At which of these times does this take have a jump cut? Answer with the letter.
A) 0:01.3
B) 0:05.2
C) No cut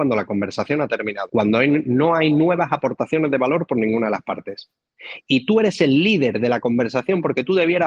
A